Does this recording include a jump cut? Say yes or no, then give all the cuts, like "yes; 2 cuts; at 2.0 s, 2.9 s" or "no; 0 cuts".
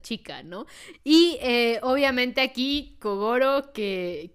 yes; 1 cut; at 0.9 s